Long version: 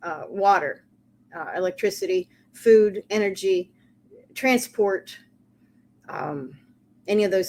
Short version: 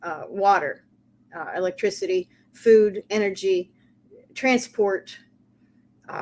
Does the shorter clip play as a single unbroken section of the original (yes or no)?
yes